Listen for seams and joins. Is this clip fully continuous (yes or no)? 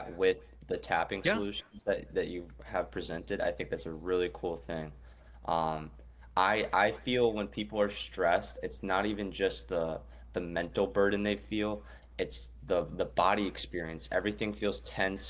yes